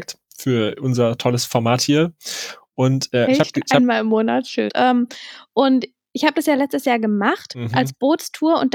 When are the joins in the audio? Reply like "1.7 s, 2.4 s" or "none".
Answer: 4.7 s